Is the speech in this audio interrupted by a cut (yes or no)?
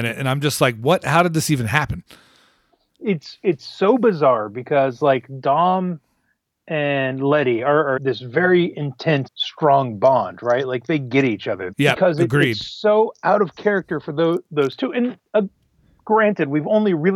yes